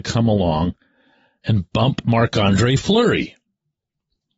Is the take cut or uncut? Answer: uncut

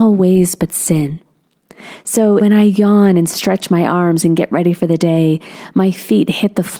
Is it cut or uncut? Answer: cut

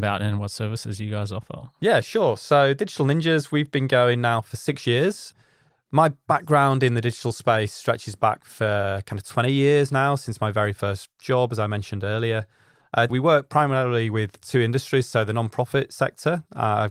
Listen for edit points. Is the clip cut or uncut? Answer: cut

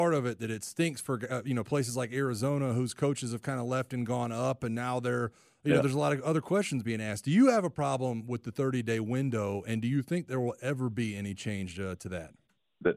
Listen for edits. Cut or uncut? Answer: uncut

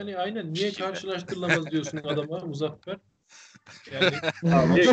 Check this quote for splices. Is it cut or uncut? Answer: uncut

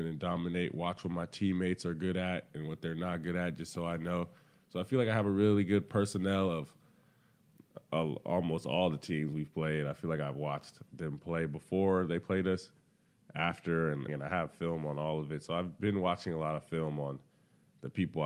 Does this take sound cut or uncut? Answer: cut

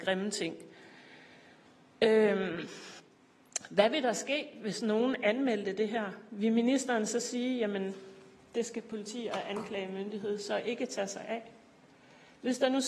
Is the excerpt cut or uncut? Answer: uncut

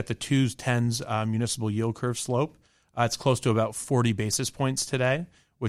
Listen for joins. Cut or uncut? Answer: uncut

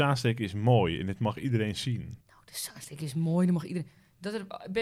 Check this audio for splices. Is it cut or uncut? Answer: cut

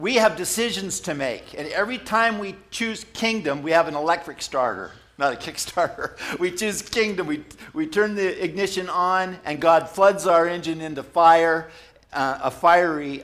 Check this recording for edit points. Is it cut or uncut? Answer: uncut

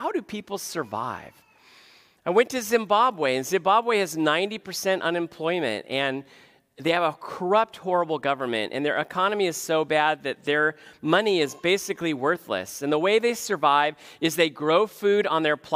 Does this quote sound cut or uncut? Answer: uncut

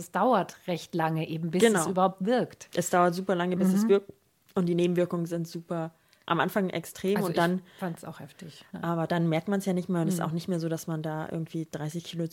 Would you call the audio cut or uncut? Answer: uncut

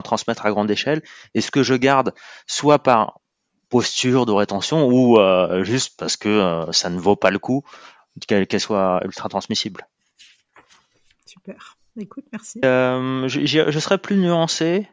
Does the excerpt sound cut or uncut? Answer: cut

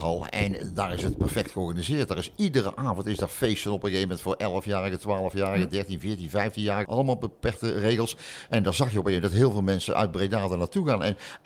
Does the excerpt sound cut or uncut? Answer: cut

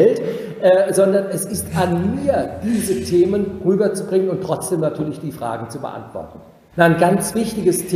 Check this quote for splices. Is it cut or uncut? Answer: cut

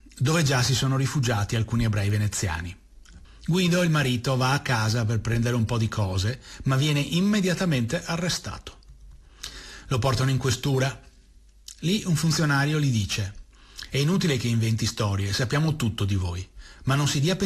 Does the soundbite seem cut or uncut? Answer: cut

